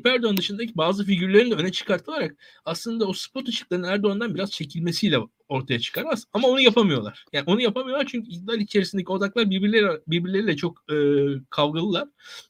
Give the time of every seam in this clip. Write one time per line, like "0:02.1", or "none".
none